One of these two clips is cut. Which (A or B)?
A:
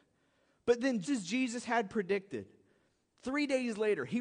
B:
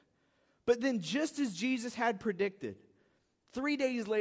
A